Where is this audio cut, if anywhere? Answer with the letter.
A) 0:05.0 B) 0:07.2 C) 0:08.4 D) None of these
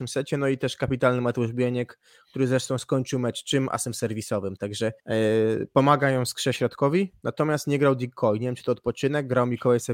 A